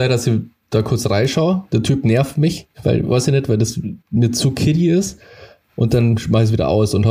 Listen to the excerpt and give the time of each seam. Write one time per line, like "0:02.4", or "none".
0:04.0